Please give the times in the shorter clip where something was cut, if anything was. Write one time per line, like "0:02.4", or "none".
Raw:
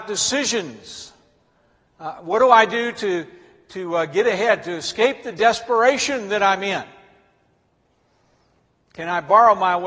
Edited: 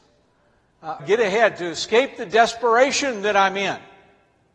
0:01.0

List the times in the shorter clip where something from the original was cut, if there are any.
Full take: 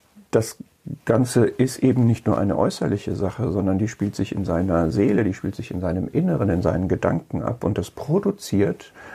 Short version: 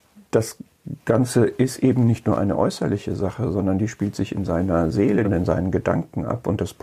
0:05.2

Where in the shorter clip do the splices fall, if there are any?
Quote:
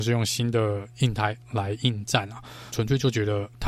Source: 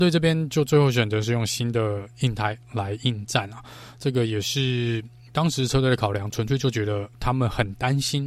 0:02.7

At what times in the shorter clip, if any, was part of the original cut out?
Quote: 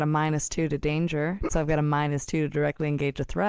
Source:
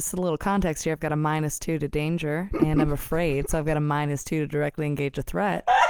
0:01.5

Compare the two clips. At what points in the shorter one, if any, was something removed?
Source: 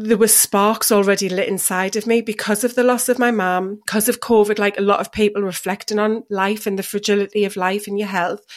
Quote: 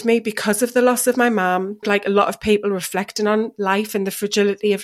0:01.8

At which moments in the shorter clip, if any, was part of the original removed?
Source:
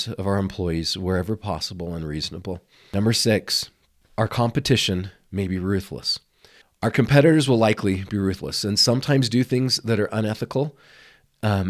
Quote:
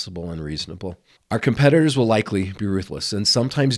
0:01.2

